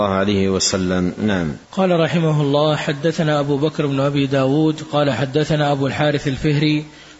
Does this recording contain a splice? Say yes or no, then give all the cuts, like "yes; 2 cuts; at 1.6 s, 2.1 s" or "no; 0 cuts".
yes; 1 cut; at 1.6 s